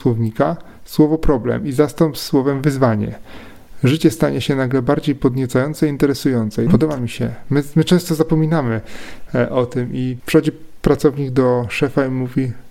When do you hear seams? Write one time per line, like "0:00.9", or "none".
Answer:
0:06.7
0:10.2